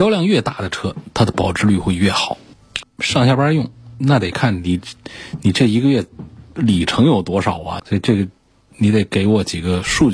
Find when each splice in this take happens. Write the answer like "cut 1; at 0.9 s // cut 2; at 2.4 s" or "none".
cut 1; at 2.8 s // cut 2; at 7.8 s